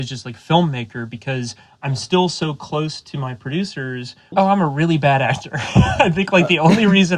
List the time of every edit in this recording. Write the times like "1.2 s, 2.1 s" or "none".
4.3 s